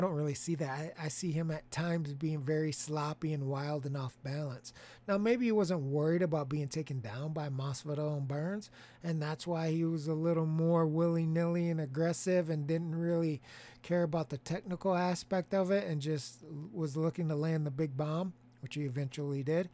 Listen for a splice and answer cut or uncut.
uncut